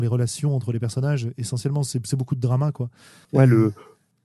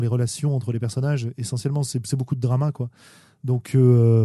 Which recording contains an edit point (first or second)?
first